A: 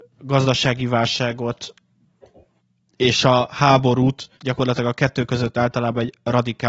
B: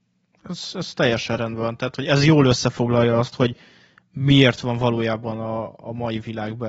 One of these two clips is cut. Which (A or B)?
A